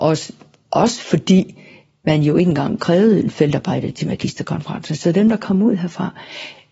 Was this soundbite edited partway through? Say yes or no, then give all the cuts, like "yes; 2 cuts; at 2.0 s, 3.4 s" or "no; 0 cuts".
yes; 1 cut; at 3.9 s